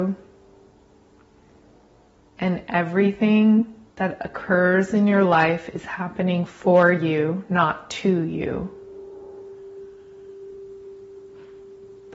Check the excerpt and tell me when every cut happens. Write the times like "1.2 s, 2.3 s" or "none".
3.9 s